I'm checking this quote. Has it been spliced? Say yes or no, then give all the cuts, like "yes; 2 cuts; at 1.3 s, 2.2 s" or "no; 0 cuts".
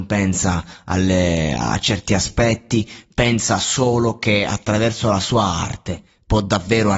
no; 0 cuts